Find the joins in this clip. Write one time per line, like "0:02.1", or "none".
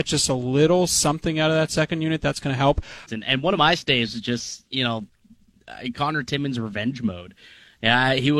0:03.1